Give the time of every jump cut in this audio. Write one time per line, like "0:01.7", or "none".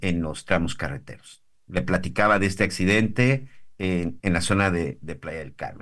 0:04.2